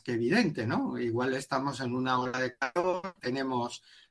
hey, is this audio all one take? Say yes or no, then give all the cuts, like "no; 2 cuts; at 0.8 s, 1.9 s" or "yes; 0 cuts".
no; 1 cut; at 3.2 s